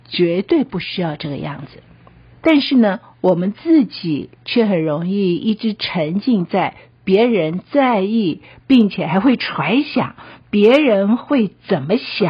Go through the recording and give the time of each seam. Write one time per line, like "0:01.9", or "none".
0:02.3

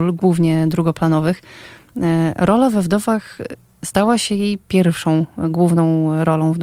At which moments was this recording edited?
none

